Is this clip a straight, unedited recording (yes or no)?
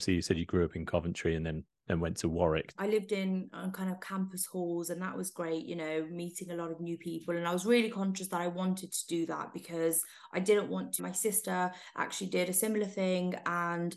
no